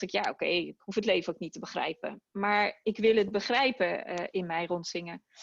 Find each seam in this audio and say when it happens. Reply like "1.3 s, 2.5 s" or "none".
2.8 s